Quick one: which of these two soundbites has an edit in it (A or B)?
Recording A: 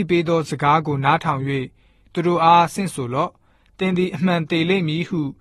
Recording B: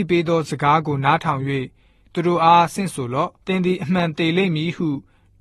B